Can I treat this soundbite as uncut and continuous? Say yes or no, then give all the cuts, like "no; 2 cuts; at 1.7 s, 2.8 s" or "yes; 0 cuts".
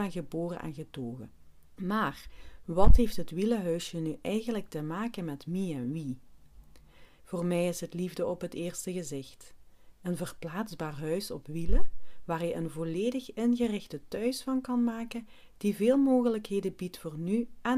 no; 2 cuts; at 1.8 s, 7.2 s